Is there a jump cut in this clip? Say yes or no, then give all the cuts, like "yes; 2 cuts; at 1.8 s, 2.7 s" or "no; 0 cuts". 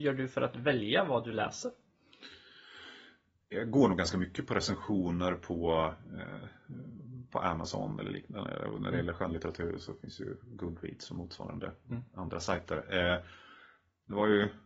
no; 0 cuts